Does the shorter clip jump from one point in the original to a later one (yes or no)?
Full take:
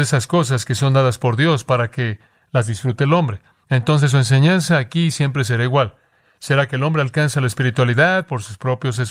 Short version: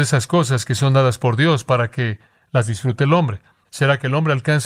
yes